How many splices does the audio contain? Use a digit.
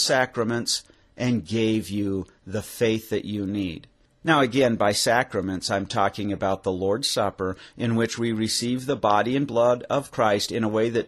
0